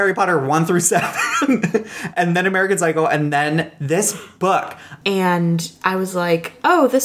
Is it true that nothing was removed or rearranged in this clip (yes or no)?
no